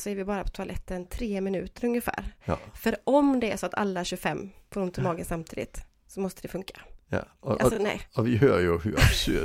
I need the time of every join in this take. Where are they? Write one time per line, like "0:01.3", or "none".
none